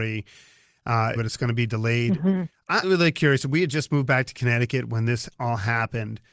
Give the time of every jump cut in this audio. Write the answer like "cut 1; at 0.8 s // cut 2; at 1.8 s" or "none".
cut 1; at 1.2 s // cut 2; at 2.8 s